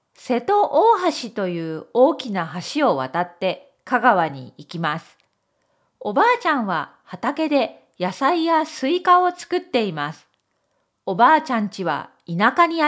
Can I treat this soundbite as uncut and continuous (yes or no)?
yes